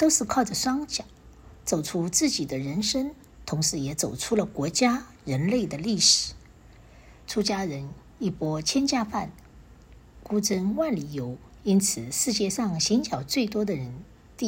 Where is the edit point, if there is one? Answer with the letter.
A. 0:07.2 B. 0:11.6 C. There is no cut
A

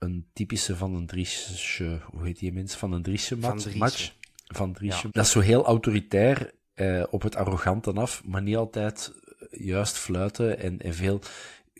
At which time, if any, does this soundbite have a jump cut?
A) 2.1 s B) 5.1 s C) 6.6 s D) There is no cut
B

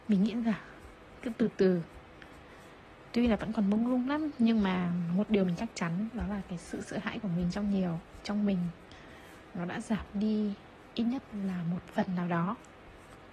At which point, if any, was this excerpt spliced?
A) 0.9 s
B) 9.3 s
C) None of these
C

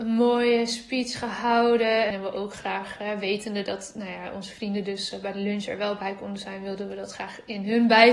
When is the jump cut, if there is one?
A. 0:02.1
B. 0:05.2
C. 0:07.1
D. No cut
A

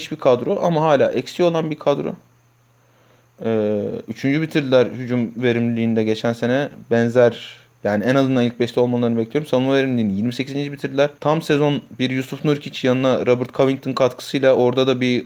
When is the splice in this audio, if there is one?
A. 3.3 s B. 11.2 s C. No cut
B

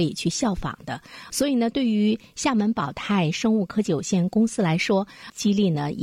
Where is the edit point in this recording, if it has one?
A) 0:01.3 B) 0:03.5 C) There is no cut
A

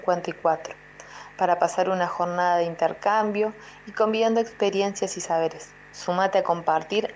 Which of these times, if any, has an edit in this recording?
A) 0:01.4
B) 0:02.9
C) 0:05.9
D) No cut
C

